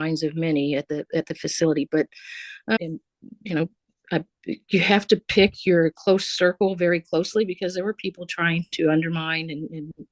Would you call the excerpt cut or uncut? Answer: cut